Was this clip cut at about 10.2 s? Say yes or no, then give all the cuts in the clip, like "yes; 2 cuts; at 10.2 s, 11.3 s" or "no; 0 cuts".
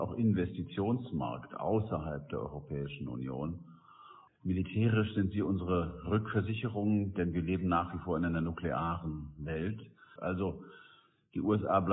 yes; 2 cuts; at 4.3 s, 10.2 s